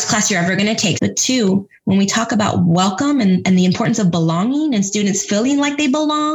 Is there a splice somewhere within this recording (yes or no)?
yes